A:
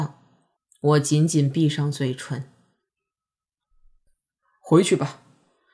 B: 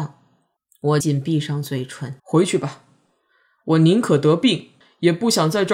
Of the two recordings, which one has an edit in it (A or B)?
B